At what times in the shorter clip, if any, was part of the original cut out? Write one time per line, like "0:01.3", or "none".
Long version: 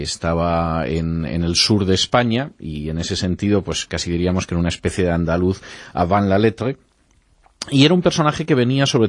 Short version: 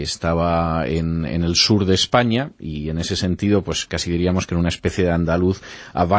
none